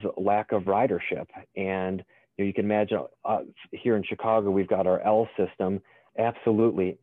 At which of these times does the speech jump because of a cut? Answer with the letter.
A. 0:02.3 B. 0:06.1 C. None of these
B